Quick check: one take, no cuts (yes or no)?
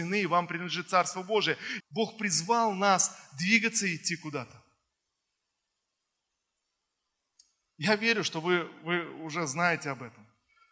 no